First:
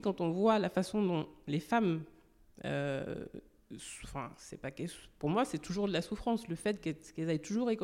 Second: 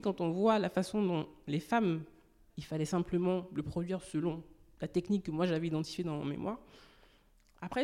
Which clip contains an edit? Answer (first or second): second